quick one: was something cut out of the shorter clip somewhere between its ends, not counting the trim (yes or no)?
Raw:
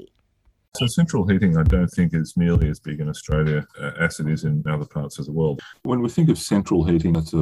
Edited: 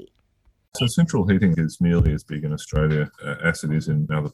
yes